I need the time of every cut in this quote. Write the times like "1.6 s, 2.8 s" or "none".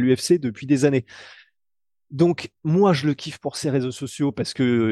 none